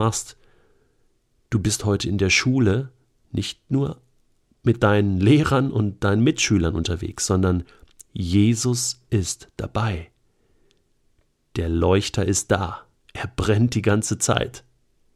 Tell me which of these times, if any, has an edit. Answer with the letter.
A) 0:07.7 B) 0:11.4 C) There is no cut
C